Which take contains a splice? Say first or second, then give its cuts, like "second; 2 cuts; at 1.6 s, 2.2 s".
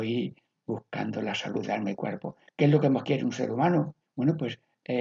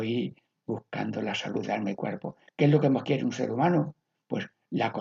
first; 1 cut; at 4.0 s